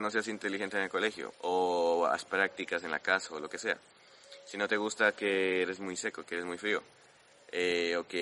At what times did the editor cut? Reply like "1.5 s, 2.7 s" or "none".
1.3 s